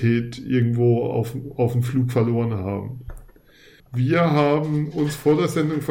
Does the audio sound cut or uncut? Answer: cut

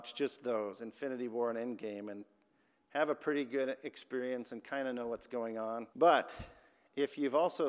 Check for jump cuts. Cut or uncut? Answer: cut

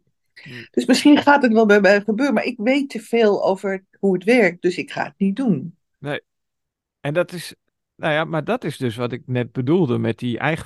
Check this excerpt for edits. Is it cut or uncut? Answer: cut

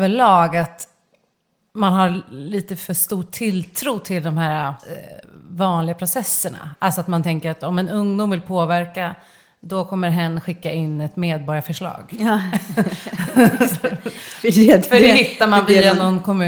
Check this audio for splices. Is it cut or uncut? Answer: uncut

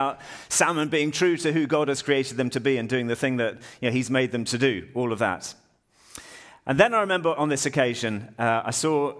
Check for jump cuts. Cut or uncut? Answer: uncut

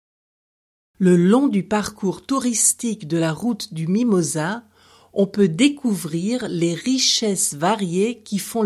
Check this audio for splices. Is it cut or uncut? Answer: uncut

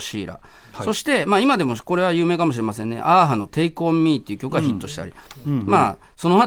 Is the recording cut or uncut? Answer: uncut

